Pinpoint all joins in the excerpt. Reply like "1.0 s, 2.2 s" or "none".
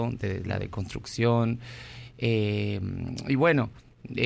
none